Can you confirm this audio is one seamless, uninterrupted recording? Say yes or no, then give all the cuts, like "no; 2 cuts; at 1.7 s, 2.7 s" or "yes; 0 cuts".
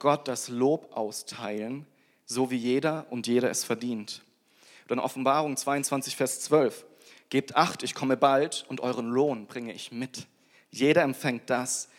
yes; 0 cuts